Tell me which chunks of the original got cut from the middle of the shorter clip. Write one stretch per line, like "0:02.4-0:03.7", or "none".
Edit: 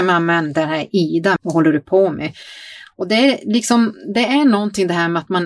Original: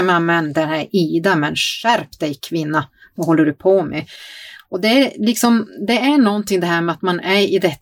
0:01.4-0:03.1